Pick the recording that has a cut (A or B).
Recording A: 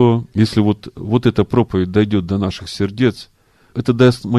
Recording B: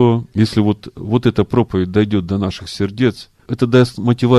B